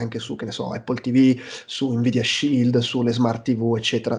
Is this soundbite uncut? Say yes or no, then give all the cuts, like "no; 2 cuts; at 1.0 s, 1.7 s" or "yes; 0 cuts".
yes; 0 cuts